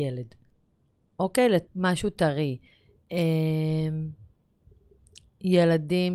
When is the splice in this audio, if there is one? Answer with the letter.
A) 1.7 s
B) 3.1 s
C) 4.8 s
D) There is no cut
A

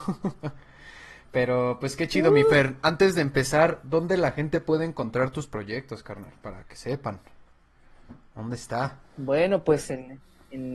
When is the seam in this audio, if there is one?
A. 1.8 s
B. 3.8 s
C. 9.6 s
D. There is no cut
D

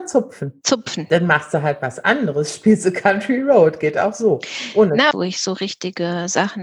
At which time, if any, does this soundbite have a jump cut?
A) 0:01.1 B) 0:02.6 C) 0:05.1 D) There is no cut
C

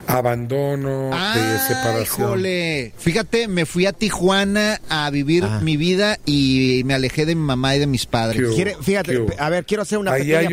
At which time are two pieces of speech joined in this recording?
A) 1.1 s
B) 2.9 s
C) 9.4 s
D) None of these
D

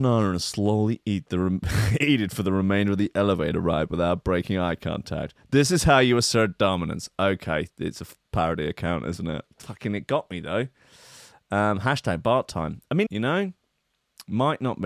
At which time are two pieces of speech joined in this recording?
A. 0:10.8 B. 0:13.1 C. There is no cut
B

